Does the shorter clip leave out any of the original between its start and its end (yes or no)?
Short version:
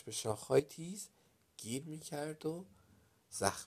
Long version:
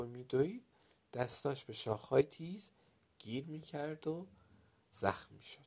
no